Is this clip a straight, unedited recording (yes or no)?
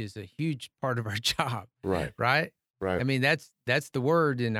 yes